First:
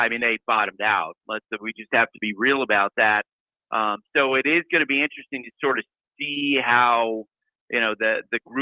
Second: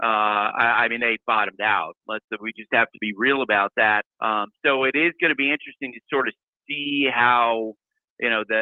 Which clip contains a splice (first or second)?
second